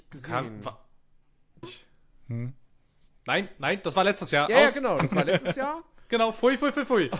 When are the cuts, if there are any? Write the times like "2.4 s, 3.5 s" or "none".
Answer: 1.6 s